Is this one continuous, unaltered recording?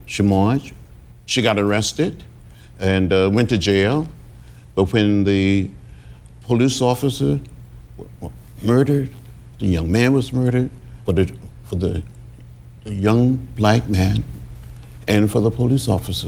no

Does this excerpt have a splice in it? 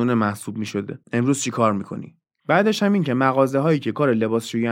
yes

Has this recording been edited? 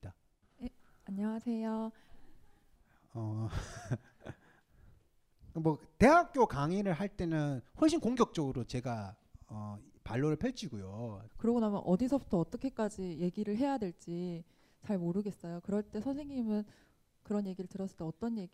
yes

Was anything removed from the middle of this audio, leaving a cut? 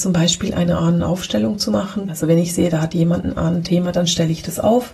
yes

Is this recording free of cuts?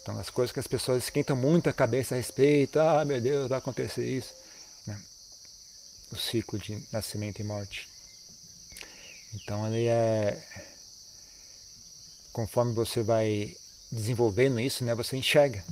no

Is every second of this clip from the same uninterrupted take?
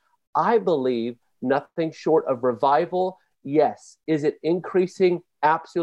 no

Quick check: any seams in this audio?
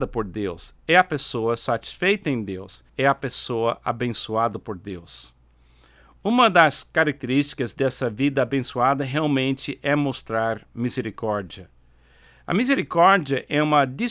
yes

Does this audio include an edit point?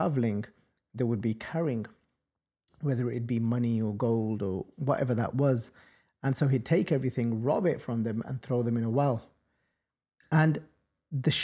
no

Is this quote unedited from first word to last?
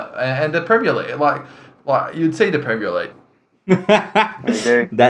no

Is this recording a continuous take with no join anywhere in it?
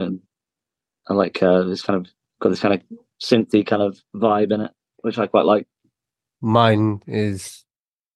yes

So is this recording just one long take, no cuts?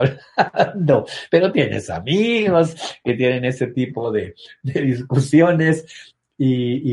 yes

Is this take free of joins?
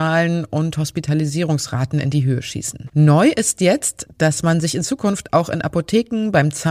no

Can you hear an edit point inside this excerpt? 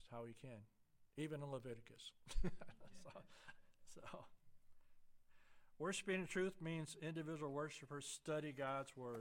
no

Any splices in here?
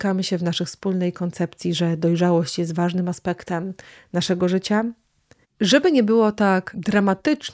yes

